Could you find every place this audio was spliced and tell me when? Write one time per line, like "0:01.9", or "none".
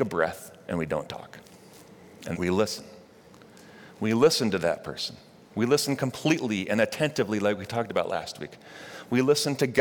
0:02.3